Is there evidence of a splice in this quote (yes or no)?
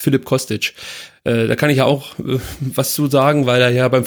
no